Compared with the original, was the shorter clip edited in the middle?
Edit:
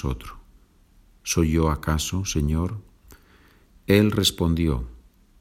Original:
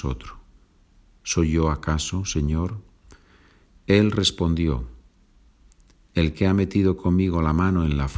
no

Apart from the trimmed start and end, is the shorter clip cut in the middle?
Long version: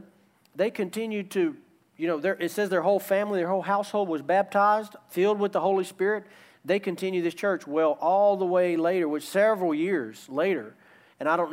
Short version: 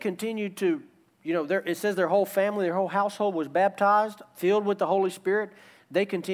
no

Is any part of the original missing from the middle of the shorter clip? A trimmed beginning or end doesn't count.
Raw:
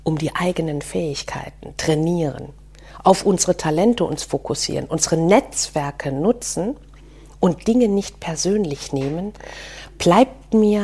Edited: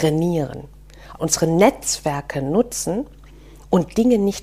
yes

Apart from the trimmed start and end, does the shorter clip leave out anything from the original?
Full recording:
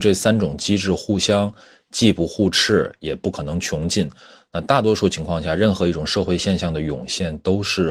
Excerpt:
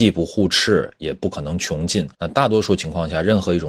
yes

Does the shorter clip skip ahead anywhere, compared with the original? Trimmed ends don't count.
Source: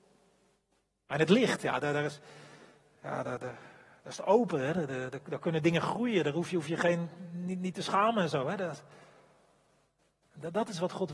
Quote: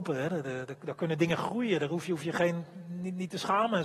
no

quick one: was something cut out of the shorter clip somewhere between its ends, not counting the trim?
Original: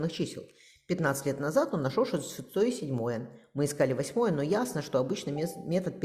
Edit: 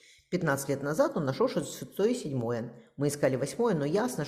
no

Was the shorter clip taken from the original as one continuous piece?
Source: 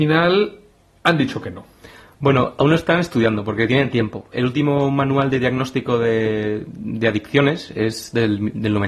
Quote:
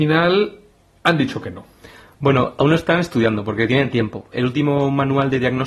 yes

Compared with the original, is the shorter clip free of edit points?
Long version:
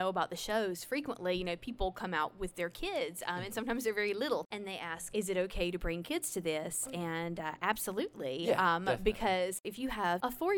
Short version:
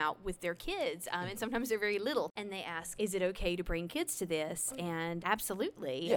no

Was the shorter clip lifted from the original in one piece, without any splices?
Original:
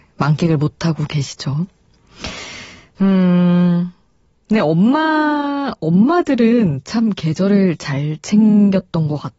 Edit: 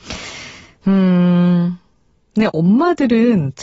no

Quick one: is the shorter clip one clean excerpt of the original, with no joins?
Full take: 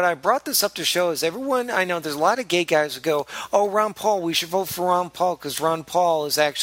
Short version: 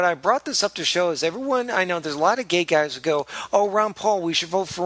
yes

